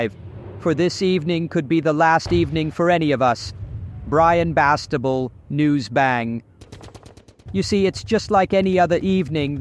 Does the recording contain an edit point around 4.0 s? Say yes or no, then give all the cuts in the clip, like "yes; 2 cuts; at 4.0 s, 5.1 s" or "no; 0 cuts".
no; 1 cut; at 7.5 s